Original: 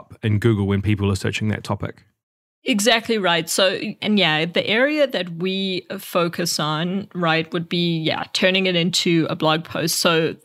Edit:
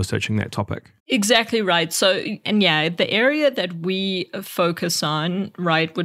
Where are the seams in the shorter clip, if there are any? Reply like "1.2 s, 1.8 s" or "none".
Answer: 1.0 s